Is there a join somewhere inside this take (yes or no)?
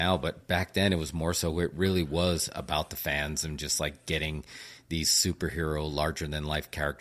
no